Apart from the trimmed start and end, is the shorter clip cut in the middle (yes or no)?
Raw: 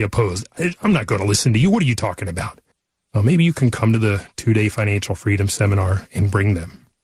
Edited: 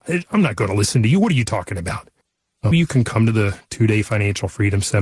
yes